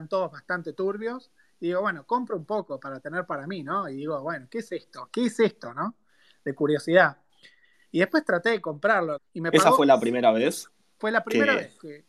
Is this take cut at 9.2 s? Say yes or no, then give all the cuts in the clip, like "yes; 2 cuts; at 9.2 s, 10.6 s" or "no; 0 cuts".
yes; 1 cut; at 9.2 s